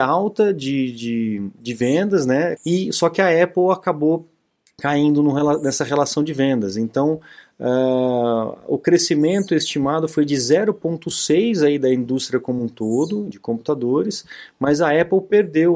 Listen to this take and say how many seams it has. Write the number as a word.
two